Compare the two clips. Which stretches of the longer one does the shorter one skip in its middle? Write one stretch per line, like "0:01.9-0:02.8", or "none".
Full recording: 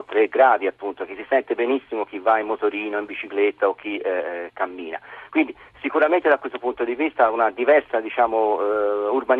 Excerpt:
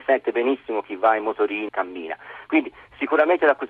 0:02.9-0:04.5